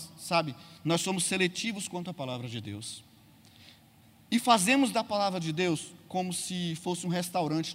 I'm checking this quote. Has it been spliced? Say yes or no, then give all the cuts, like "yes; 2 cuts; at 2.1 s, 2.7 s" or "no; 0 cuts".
no; 0 cuts